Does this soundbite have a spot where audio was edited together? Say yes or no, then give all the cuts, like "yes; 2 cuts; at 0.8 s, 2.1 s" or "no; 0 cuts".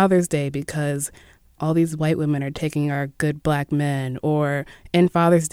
no; 0 cuts